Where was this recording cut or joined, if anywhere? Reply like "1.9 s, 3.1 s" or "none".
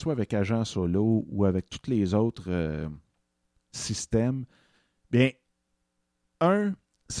none